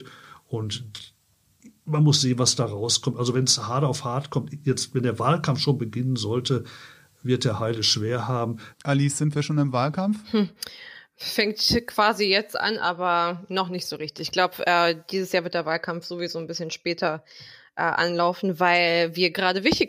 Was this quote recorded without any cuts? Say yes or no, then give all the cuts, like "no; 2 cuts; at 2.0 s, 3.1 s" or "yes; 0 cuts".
no; 1 cut; at 8.7 s